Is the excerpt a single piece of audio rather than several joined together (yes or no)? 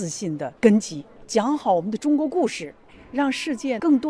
yes